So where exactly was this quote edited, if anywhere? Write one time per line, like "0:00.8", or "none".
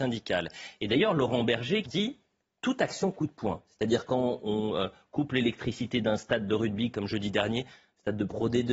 0:01.8

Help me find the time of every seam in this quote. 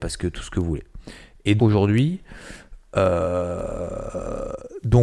0:01.6

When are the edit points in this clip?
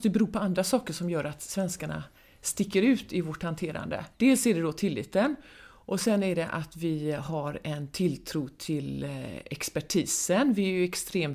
0:04.1

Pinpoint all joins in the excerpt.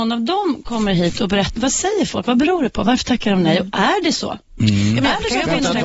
0:01.6

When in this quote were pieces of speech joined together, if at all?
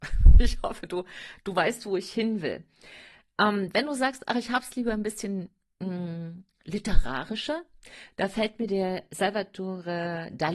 none

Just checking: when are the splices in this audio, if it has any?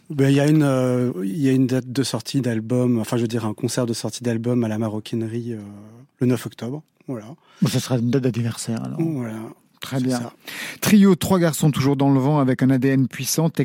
none

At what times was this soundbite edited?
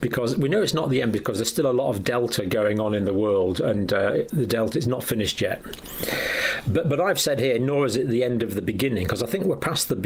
none

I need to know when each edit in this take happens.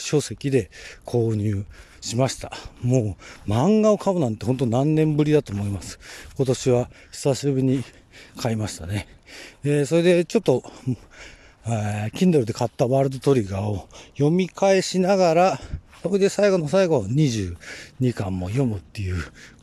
none

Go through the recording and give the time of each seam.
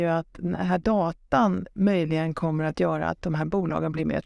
none

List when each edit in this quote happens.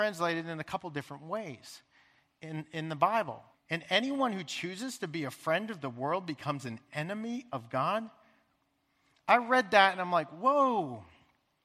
0:03.5

